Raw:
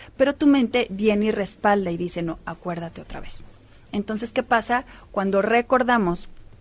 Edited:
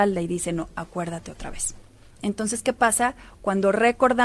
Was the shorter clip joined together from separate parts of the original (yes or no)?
no